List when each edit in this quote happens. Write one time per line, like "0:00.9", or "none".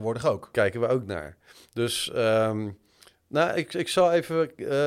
none